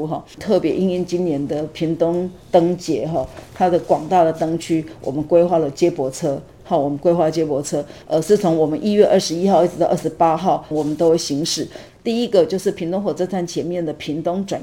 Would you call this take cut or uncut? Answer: cut